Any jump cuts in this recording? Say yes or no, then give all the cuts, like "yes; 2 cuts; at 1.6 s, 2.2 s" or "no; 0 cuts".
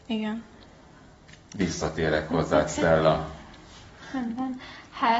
no; 0 cuts